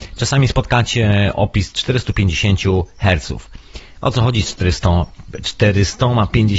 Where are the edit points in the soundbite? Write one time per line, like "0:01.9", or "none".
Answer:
none